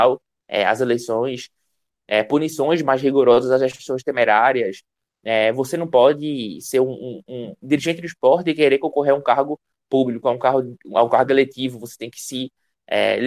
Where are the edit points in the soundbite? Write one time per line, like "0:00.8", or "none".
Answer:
none